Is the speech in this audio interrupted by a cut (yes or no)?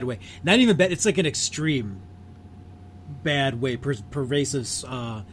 no